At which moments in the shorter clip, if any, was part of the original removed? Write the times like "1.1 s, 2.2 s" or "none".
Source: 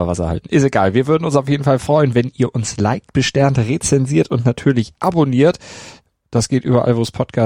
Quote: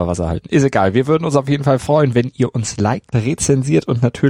3.1 s